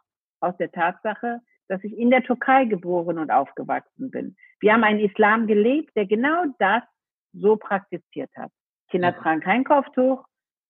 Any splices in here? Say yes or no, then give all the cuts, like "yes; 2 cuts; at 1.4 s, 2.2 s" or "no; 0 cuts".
no; 0 cuts